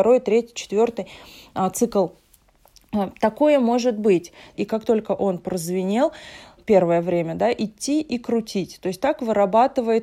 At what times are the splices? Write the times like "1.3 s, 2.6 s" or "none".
4.5 s, 6.6 s